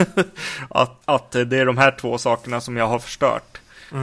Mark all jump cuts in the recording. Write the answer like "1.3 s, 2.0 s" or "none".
1.0 s